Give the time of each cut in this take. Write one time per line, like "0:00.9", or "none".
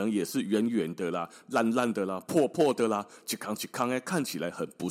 none